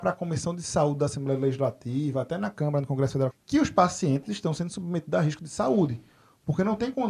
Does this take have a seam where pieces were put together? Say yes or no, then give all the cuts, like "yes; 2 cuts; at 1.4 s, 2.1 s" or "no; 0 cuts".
yes; 1 cut; at 3.3 s